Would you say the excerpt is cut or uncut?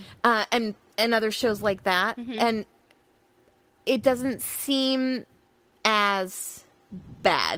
uncut